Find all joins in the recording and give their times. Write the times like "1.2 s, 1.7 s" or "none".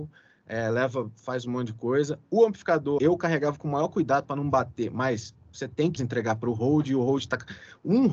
3.0 s, 6.0 s